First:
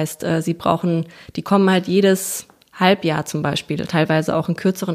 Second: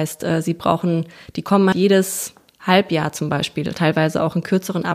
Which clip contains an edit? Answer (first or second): second